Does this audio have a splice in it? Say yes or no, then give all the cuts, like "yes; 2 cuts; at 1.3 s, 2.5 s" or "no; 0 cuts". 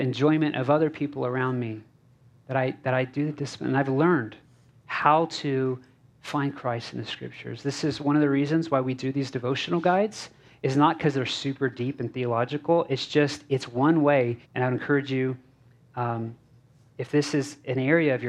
yes; 1 cut; at 14.4 s